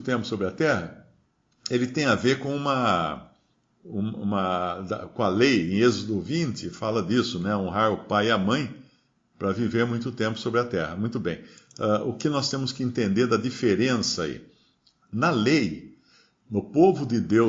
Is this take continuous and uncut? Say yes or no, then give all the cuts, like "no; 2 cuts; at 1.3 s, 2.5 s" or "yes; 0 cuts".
yes; 0 cuts